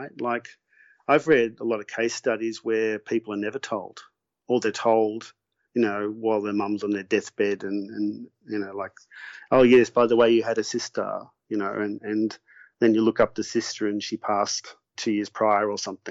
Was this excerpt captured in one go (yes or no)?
no